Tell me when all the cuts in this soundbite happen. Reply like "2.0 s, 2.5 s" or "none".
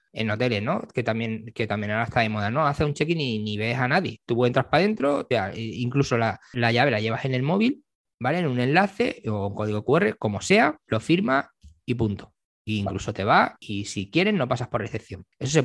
10.9 s